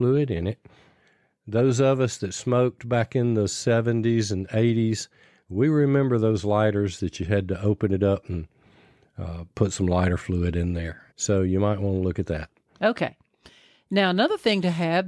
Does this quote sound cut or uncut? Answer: cut